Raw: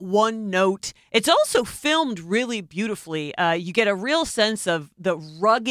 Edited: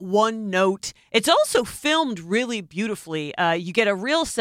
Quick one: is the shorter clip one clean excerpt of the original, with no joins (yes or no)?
yes